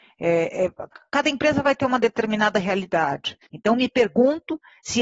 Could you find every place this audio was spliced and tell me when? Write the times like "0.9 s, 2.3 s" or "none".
0.9 s, 3.5 s